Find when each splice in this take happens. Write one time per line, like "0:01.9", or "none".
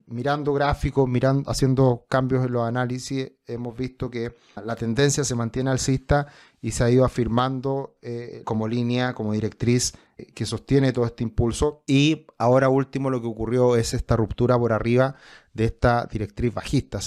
0:08.4
0:10.3